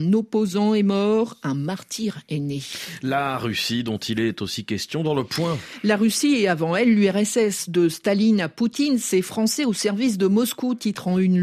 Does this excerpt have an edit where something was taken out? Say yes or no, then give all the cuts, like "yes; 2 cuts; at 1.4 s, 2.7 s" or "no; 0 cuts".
no; 0 cuts